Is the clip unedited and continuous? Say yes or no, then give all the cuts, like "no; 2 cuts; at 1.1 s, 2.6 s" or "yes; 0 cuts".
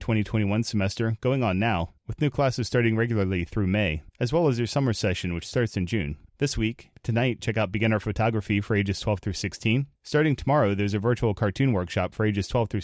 no; 1 cut; at 6.3 s